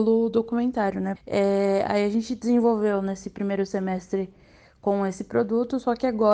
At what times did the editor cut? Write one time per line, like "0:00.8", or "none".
0:01.1